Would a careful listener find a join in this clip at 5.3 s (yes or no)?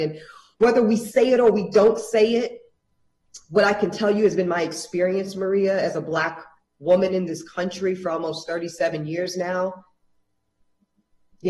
no